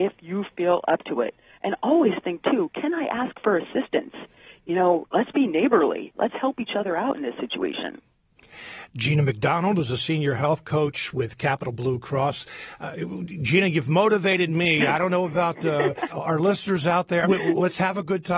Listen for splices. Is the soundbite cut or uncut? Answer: cut